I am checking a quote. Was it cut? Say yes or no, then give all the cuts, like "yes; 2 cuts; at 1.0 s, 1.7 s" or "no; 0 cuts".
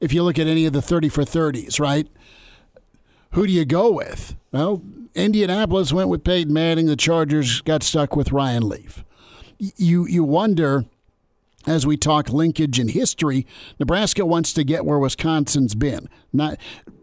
no; 0 cuts